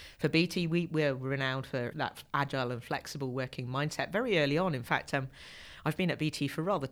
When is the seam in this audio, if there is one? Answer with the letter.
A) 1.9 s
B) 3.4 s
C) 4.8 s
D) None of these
A